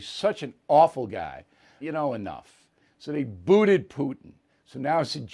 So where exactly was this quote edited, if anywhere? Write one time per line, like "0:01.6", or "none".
0:01.8